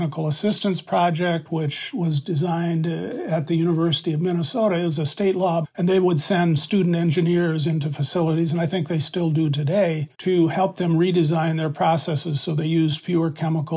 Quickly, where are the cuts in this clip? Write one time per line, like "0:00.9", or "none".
0:05.6
0:10.1

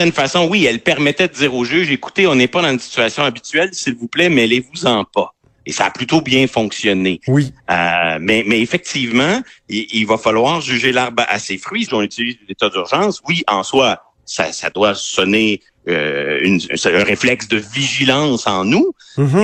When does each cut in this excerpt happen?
0:11.9
0:16.7

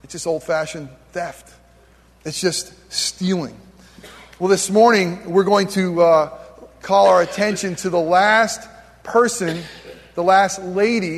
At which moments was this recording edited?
none

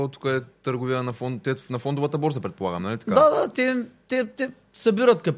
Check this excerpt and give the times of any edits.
none

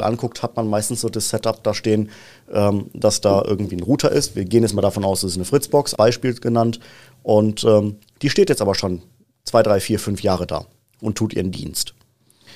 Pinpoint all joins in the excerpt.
0:05.9

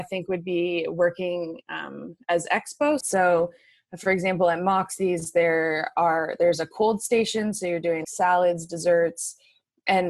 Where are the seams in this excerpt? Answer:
0:03.0
0:08.0

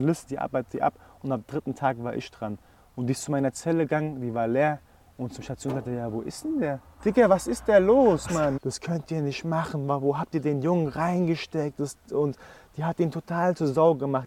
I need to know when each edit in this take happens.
0:07.0
0:08.6

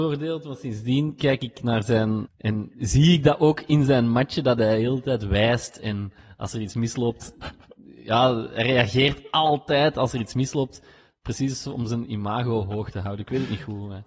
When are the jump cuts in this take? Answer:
0:02.3

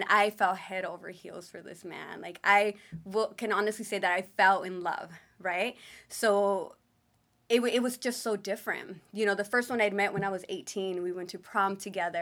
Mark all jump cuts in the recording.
none

